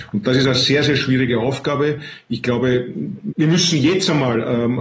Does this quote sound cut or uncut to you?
cut